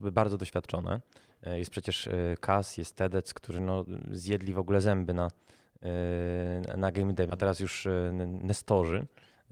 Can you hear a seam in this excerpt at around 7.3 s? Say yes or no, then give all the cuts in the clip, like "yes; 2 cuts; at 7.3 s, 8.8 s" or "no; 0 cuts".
yes; 1 cut; at 7.3 s